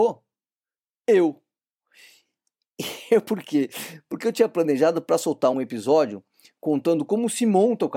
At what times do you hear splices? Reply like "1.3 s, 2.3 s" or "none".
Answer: 5.5 s